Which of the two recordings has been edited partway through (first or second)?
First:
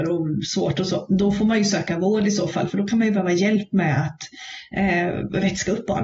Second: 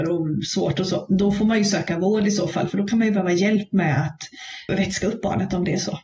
second